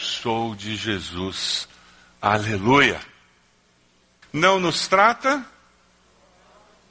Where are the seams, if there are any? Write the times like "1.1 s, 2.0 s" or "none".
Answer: 4.2 s